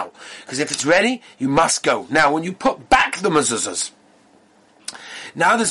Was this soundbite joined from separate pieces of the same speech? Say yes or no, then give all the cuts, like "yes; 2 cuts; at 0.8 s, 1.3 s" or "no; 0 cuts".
no; 0 cuts